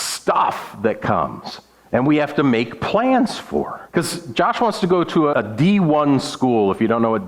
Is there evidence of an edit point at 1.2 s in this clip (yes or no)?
no